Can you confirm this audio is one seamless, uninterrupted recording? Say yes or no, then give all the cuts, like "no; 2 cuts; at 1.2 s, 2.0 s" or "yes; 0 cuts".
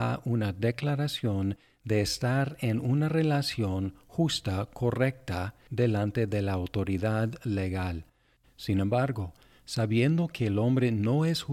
no; 2 cuts; at 5.7 s, 8.4 s